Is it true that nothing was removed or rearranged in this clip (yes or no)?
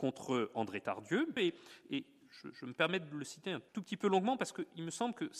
no